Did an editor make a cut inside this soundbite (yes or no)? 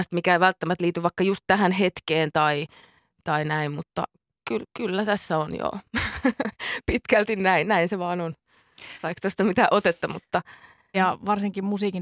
yes